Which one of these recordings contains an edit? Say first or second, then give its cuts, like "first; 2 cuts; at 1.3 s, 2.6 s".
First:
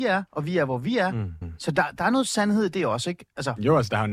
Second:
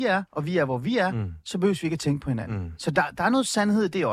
first; 1 cut; at 1.4 s